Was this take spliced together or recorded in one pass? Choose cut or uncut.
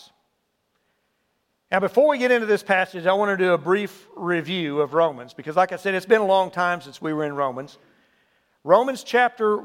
uncut